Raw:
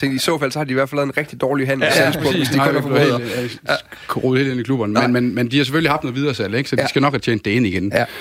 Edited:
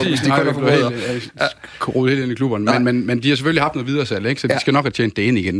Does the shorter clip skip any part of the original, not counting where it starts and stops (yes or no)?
no